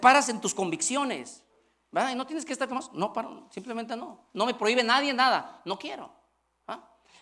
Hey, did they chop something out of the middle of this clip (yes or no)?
no